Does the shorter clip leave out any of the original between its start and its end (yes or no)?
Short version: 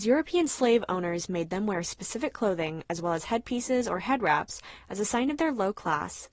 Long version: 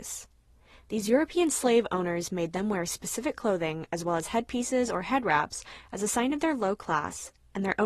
no